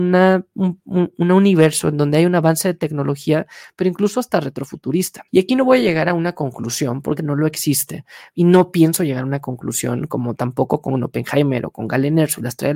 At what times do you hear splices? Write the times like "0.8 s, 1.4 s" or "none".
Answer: 5.3 s, 7.2 s